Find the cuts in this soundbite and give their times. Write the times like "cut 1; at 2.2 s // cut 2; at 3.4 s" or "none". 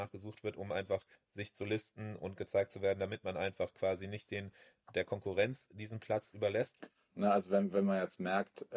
cut 1; at 1.2 s // cut 2; at 7.1 s